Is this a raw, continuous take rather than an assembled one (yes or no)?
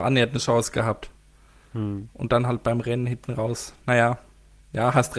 yes